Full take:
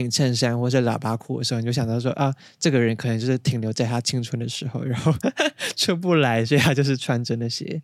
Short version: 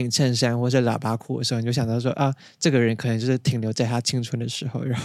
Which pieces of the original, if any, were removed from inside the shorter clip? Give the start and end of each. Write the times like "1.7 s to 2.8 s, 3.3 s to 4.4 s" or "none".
none